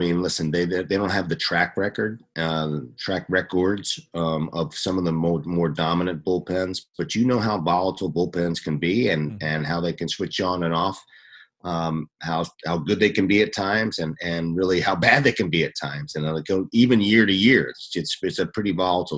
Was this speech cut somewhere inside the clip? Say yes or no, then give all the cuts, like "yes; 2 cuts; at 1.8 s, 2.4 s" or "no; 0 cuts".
no; 0 cuts